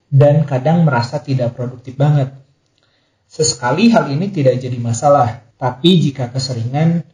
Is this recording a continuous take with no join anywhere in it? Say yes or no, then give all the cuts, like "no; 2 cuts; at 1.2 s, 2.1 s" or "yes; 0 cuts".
no; 2 cuts; at 3.1 s, 5.5 s